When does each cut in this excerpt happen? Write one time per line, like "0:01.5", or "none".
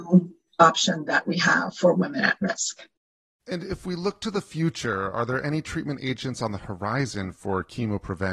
none